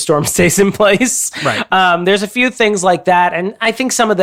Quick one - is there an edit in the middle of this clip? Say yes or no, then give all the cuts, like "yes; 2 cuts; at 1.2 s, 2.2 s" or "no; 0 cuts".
no; 0 cuts